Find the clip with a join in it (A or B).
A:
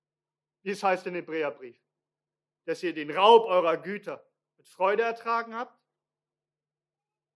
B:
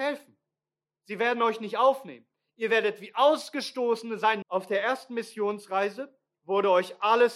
B